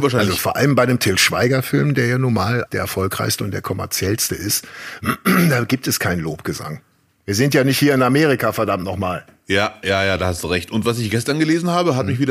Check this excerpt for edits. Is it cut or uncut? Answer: cut